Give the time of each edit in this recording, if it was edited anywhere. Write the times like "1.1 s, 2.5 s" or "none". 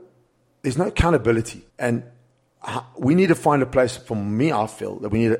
1.7 s